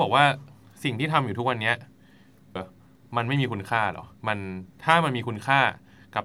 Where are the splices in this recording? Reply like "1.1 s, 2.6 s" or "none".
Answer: 2.6 s, 4.2 s

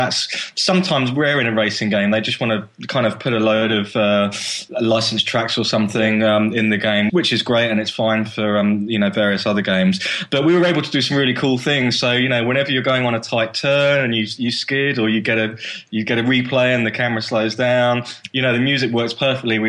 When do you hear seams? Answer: none

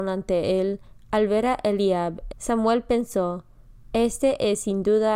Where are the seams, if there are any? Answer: 2.3 s

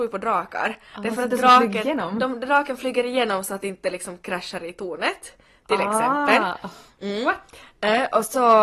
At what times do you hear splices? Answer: none

